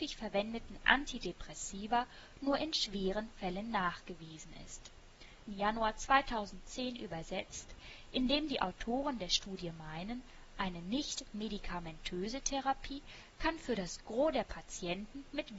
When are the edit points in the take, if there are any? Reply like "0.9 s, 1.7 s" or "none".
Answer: 5.4 s